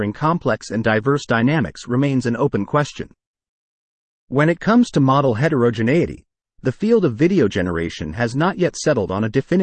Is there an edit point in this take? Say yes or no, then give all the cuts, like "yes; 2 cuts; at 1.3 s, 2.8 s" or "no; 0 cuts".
no; 0 cuts